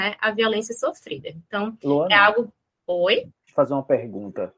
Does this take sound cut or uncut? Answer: uncut